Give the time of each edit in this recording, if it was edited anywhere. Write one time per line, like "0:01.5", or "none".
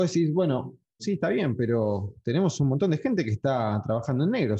0:01.0